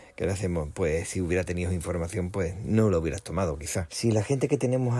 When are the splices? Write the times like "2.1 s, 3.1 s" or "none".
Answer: 3.9 s